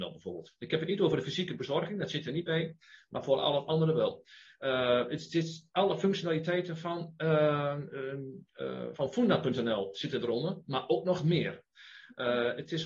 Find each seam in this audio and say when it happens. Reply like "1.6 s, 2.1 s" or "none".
none